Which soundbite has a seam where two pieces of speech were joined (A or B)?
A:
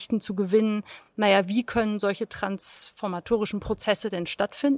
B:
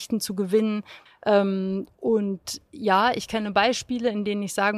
B